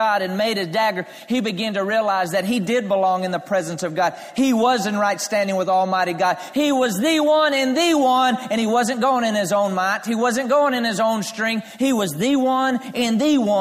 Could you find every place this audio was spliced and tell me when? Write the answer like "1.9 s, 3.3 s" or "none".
6.5 s